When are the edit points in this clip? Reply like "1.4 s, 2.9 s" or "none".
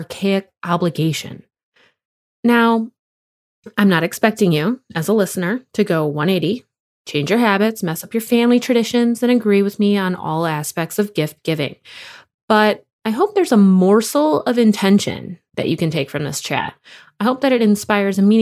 none